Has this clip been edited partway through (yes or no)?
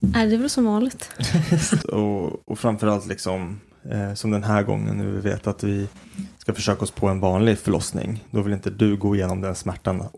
yes